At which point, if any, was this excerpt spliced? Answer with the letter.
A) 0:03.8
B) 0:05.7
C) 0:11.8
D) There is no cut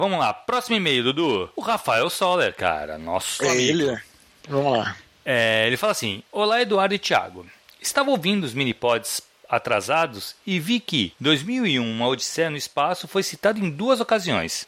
D